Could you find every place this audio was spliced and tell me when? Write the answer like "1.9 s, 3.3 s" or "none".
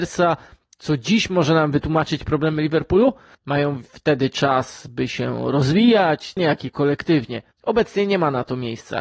3.3 s, 6.4 s, 7.5 s